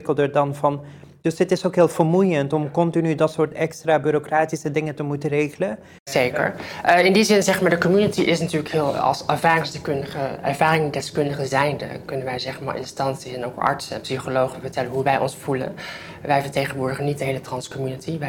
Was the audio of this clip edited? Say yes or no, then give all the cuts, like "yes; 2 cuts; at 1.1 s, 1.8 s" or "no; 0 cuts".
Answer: no; 0 cuts